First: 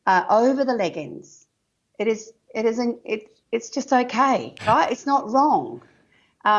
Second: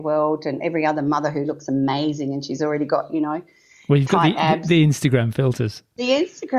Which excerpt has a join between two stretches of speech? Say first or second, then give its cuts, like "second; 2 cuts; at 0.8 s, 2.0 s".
first; 1 cut; at 4.6 s